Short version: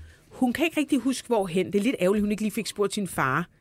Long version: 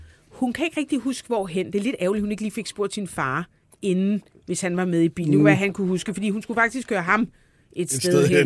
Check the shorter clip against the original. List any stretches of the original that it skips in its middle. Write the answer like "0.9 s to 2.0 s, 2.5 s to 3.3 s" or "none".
none